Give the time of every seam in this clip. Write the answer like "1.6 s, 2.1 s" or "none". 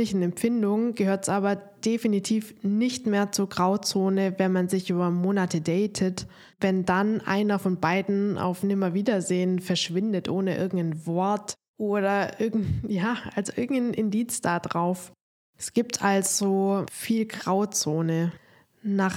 15.6 s